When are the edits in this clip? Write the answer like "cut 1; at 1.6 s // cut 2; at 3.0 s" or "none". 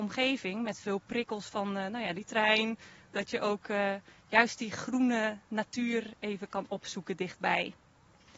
cut 1; at 3.1 s